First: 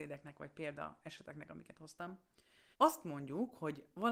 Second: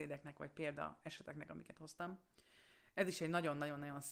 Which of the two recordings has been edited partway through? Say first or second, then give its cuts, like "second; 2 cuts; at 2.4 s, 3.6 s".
first; 1 cut; at 2.7 s